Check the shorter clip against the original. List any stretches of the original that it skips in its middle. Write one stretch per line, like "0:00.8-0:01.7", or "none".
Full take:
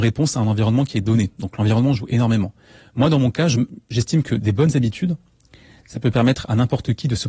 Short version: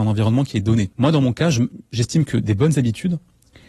0:01.3-0:02.9